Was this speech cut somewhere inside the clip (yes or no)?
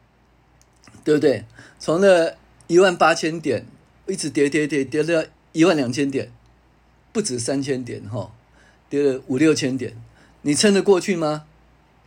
yes